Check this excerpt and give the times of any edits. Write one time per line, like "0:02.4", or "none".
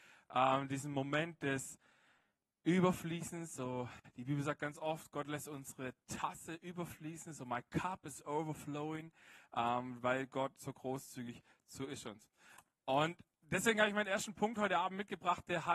none